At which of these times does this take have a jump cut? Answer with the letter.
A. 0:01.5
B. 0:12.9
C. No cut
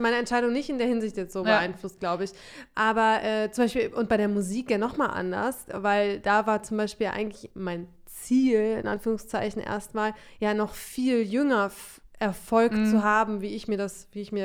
C